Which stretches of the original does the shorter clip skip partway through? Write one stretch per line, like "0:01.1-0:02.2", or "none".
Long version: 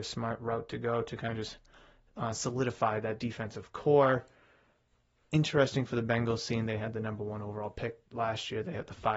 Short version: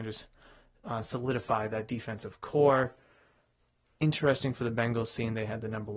none